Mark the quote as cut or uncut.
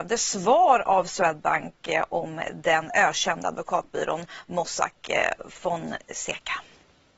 uncut